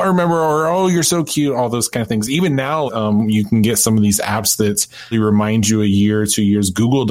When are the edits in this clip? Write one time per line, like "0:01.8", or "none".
0:02.9
0:05.1